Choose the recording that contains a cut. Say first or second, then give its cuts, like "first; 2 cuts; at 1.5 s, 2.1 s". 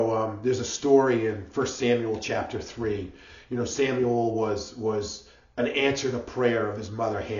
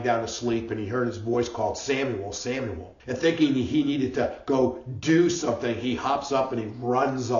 second; 1 cut; at 3.0 s